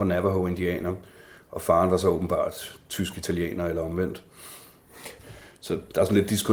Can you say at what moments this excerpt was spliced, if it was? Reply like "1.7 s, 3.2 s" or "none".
5.2 s